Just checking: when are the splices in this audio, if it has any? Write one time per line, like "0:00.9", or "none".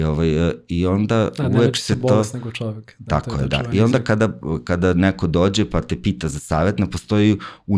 none